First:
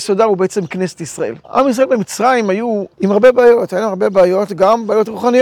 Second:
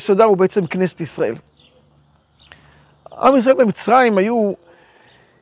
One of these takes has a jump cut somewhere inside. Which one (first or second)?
first